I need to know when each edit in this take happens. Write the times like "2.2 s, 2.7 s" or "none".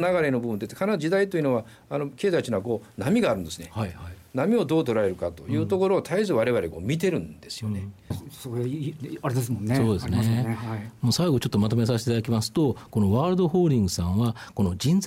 8.1 s